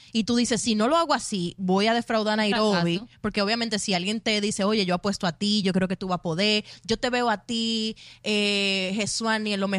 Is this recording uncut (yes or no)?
no